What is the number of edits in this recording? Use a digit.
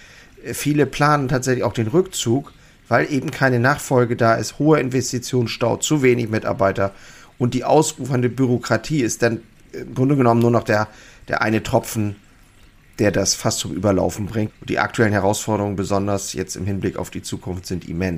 1